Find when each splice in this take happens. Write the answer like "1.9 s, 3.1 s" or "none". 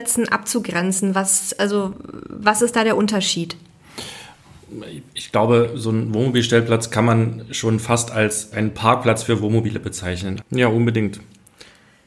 8.5 s, 10.4 s